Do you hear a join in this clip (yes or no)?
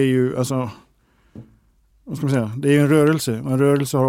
no